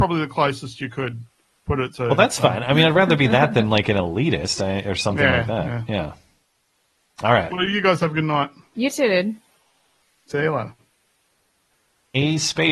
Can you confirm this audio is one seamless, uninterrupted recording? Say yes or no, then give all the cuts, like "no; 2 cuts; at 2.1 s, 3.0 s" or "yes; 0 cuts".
no; 1 cut; at 7.5 s